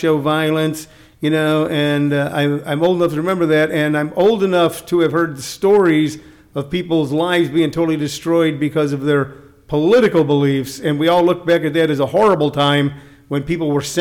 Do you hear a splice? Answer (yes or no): no